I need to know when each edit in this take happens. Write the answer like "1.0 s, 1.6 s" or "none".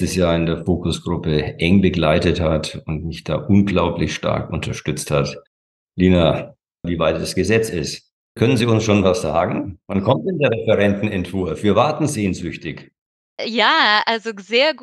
6.8 s, 13.4 s